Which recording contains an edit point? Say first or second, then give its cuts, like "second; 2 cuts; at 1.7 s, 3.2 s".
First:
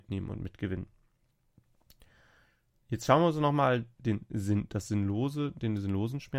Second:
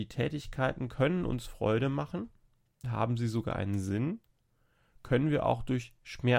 second; 1 cut; at 2.8 s